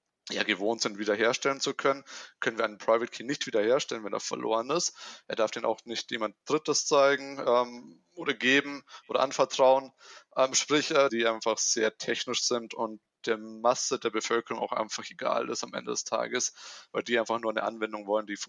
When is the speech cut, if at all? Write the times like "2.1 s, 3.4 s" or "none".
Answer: 11.1 s